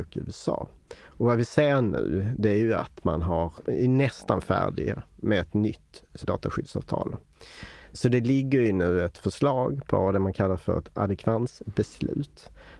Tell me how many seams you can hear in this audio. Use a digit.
1